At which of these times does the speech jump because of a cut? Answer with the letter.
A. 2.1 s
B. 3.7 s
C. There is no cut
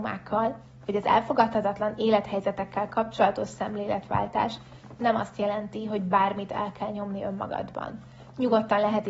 C